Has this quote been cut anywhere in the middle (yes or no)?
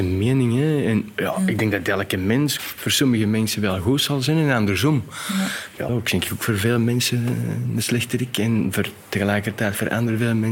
yes